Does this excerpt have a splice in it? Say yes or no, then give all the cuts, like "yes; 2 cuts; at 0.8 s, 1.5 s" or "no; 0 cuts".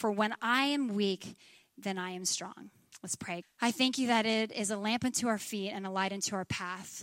yes; 1 cut; at 3.4 s